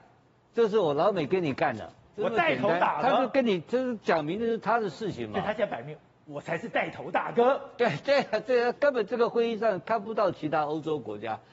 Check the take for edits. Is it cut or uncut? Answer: uncut